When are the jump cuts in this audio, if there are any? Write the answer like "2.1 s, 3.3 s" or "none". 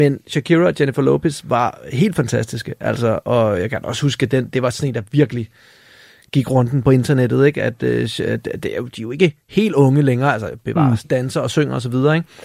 11.0 s